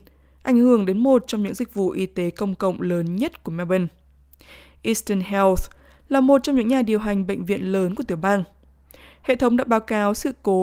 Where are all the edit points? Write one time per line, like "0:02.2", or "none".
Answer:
none